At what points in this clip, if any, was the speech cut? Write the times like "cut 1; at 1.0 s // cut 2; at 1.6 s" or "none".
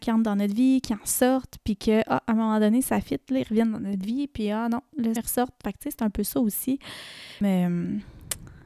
cut 1; at 5.2 s // cut 2; at 7.4 s